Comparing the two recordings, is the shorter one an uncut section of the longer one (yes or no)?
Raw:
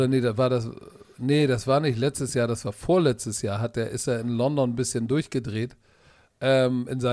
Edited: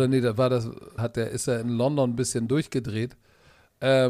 no